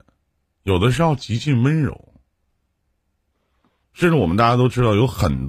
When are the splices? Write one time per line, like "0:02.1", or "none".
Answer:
0:03.8